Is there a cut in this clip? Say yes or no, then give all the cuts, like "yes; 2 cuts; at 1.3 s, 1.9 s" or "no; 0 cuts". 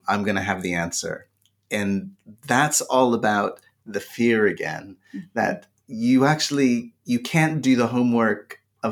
no; 0 cuts